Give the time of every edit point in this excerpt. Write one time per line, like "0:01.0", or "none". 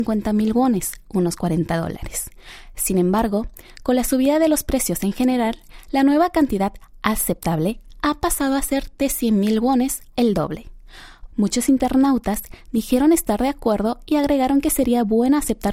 0:10.1
0:11.3